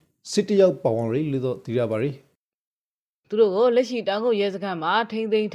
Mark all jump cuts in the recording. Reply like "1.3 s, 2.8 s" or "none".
none